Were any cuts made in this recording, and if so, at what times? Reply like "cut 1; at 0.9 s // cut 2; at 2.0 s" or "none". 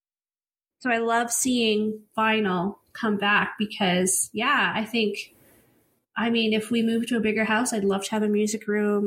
none